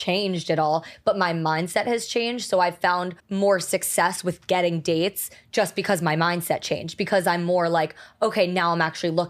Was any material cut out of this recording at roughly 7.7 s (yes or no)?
no